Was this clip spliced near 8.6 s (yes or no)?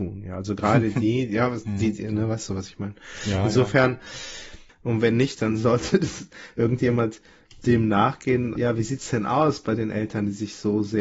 yes